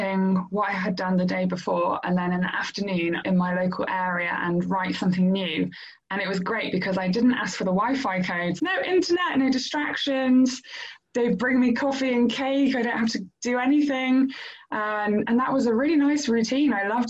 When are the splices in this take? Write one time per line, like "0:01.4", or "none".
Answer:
0:03.2
0:08.6